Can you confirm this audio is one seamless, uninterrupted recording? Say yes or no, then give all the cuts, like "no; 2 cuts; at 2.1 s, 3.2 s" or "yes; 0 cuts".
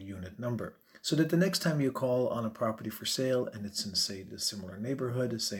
yes; 0 cuts